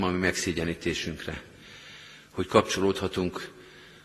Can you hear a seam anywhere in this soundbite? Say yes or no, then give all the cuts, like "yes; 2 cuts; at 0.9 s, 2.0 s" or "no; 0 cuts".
no; 0 cuts